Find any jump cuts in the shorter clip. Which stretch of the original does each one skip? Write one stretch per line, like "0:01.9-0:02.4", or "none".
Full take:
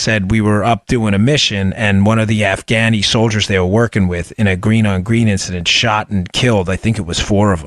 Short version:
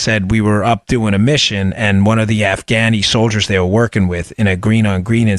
none